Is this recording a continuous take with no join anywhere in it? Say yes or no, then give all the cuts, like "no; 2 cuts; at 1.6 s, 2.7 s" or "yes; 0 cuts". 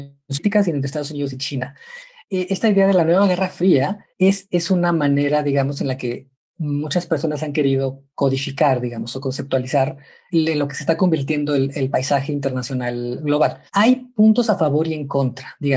no; 2 cuts; at 2.2 s, 4.1 s